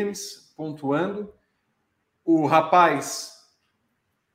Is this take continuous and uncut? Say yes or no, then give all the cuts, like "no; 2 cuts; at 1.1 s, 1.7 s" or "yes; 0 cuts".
yes; 0 cuts